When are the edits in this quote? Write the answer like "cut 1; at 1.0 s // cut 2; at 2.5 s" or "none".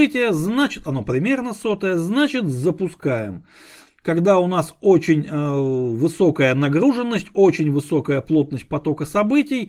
none